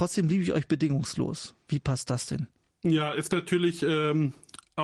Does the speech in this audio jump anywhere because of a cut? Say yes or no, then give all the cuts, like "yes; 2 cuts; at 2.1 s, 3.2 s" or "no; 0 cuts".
no; 0 cuts